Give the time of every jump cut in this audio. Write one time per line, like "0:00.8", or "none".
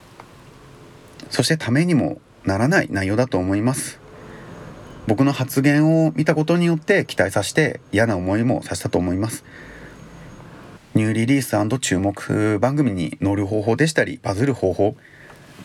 0:10.8

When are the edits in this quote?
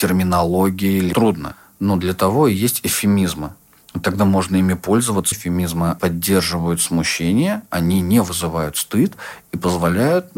0:05.3

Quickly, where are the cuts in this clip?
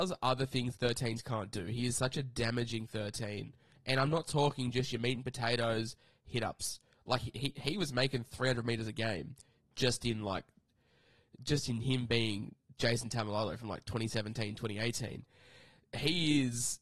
none

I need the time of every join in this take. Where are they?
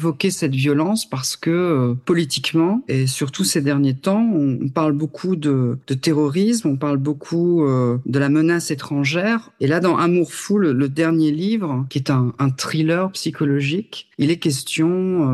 0:09.6

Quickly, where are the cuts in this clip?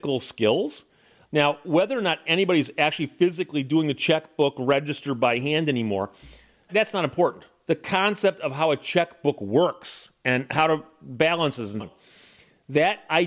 0:01.2
0:06.7
0:11.8

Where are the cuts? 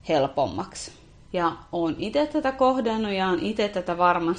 0:01.2

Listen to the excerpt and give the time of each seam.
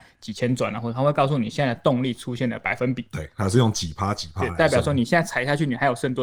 none

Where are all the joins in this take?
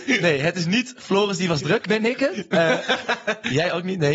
none

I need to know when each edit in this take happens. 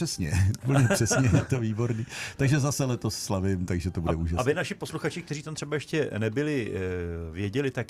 none

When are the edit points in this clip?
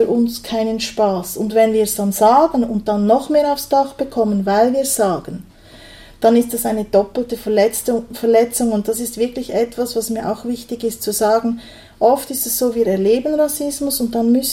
none

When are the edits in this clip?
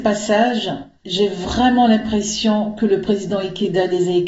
none

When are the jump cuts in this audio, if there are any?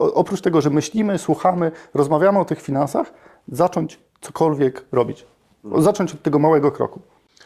none

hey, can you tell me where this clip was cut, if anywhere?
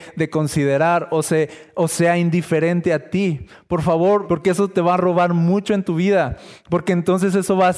0:04.3

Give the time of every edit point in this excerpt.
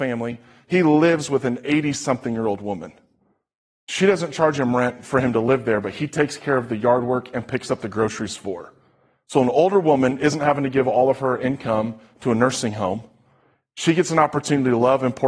none

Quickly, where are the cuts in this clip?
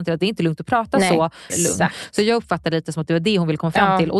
0:01.5

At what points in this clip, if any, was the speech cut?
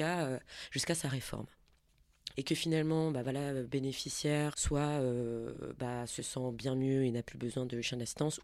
0:02.3
0:04.5

